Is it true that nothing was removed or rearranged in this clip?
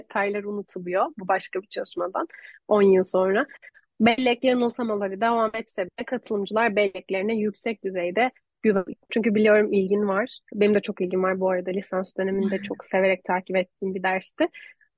no; 1 cut; at 9.1 s

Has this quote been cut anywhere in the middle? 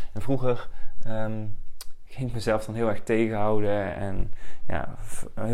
no; 0 cuts

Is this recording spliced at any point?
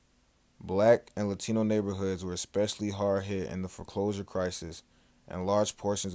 no; 0 cuts

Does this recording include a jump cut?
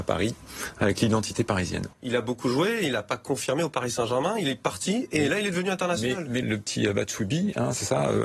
yes; 2 cuts; at 1.9 s, 6.4 s

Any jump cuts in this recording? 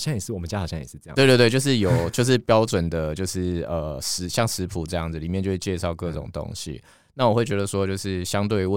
no; 0 cuts

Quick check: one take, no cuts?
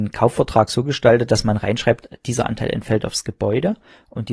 yes; 0 cuts

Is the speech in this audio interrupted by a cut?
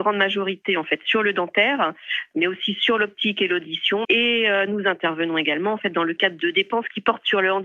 yes; 1 cut; at 4.0 s

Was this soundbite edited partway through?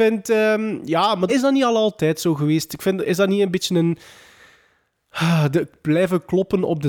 yes; 1 cut; at 1.3 s

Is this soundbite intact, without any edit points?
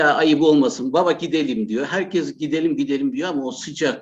yes; 0 cuts

